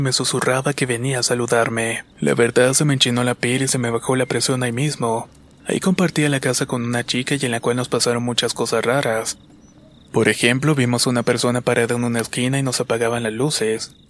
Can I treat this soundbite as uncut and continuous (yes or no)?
no